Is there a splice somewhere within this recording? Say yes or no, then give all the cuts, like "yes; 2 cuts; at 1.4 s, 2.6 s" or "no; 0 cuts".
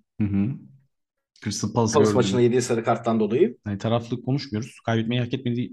yes; 2 cuts; at 1.9 s, 3.6 s